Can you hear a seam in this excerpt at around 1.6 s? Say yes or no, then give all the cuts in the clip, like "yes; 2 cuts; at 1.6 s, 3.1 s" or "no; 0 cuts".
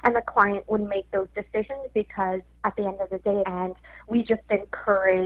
no; 1 cut; at 3.4 s